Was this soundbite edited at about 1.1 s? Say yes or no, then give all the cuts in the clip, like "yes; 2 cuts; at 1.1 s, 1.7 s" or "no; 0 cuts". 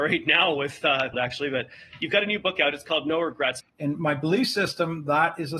yes; 2 cuts; at 1.1 s, 3.6 s